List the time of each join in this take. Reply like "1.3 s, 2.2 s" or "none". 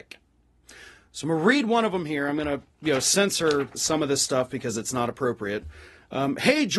3.7 s